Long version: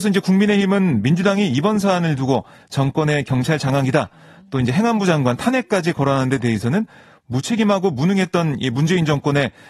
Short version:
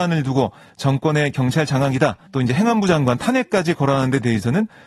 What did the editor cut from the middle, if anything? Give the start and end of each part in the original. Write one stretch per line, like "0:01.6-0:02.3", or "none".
0:04.2-0:04.4